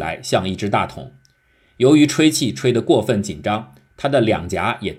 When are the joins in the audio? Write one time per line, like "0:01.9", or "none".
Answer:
none

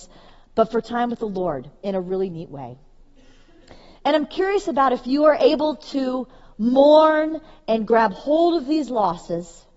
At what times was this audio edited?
0:03.9

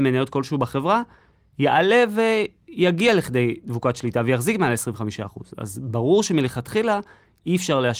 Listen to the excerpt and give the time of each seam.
none

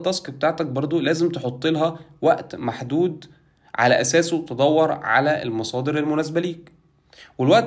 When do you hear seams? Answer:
none

